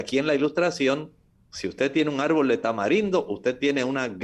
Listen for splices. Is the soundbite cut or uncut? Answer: uncut